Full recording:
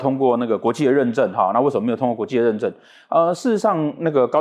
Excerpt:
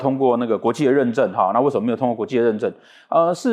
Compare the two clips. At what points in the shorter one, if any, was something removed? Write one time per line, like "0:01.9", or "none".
none